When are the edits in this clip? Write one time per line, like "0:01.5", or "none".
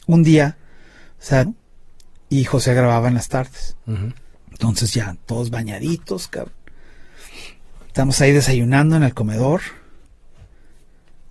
0:01.4
0:04.3